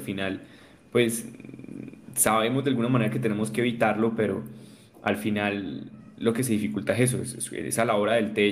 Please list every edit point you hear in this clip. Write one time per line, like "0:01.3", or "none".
none